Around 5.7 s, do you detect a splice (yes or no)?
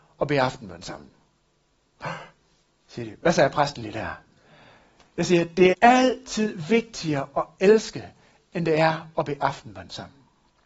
yes